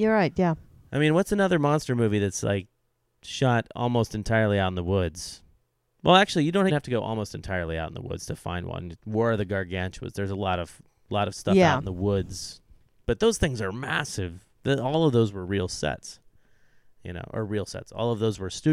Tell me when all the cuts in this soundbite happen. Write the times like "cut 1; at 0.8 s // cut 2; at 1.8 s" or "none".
cut 1; at 6.7 s